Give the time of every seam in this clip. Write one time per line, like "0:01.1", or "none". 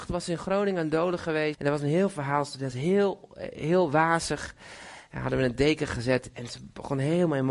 0:01.5
0:05.1